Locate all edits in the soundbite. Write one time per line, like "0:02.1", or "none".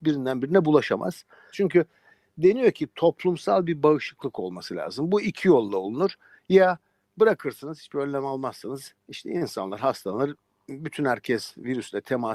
0:01.5